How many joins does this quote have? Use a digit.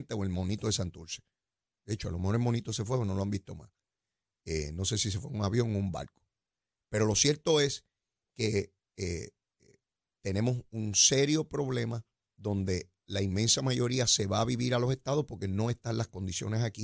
1